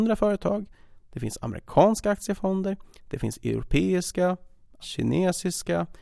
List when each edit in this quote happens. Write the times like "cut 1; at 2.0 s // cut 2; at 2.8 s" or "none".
cut 1; at 4.8 s